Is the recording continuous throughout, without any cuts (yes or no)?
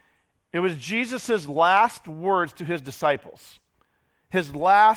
yes